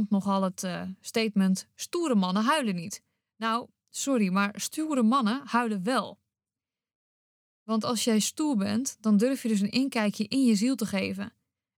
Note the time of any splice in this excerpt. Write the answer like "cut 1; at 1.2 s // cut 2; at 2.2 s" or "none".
none